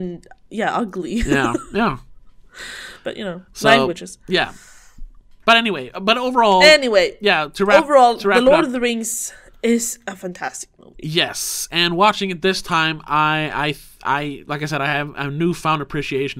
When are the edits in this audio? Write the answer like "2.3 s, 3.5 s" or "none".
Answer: none